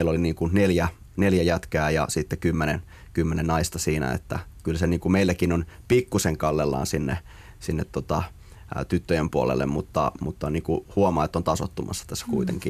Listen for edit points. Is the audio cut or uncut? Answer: uncut